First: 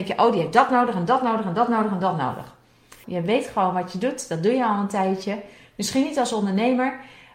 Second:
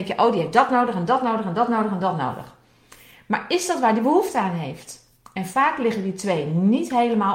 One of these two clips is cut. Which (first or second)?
first